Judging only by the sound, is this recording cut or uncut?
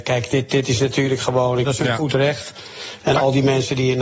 cut